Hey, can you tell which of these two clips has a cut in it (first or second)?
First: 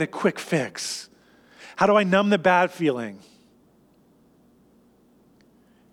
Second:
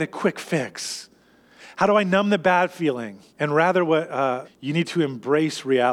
second